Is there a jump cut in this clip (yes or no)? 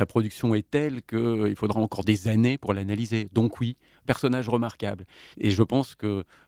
yes